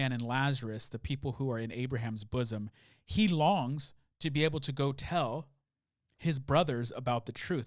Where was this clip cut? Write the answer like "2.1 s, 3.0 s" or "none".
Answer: none